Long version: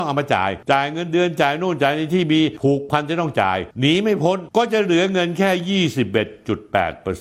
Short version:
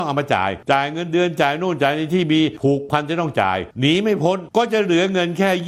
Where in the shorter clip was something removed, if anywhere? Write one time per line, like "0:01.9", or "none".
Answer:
none